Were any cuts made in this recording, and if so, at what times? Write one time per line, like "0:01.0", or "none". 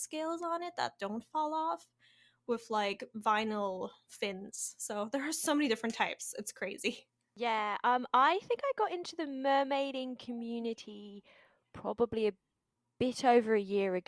none